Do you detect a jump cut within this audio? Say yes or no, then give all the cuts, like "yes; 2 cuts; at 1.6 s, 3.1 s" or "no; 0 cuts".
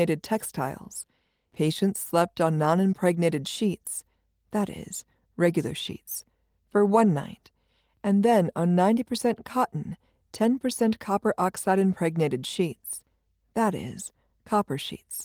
no; 0 cuts